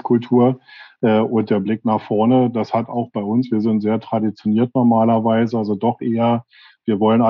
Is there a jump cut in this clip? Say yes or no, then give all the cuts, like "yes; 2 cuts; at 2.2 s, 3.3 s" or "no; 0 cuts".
no; 0 cuts